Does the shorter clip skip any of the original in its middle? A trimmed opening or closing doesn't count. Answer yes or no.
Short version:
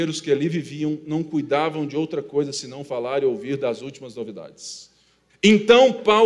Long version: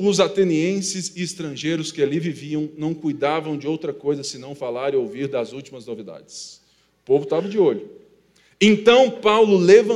yes